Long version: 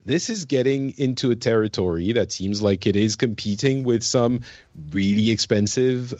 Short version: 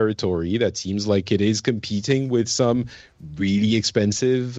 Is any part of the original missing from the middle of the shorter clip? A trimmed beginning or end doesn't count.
no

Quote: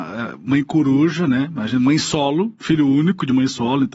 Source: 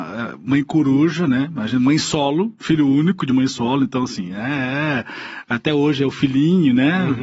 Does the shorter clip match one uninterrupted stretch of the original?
yes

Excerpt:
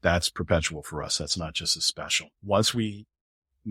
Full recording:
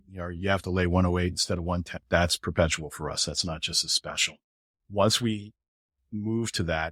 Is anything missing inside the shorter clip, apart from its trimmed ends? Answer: yes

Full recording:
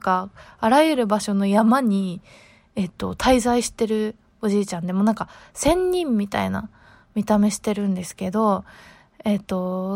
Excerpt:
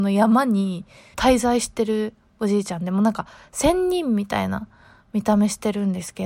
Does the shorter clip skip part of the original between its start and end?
yes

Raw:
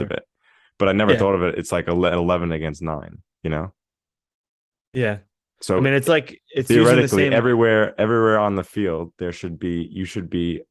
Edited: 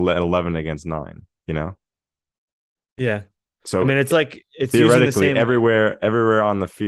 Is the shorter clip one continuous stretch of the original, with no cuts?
yes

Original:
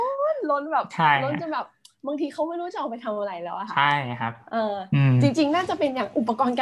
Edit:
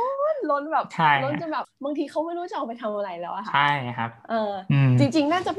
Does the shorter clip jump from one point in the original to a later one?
yes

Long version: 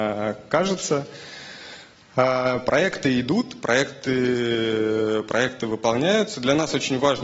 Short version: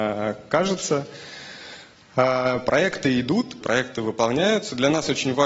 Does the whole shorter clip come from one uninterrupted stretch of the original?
no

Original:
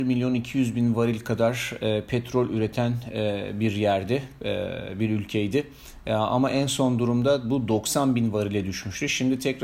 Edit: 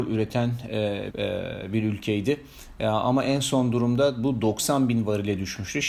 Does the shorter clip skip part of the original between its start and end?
yes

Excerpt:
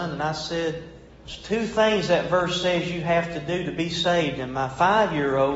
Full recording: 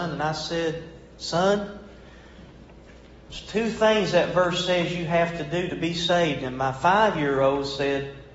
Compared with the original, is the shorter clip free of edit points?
no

